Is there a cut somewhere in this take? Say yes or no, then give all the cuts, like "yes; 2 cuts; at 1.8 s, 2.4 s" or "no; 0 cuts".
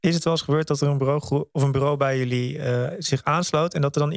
no; 0 cuts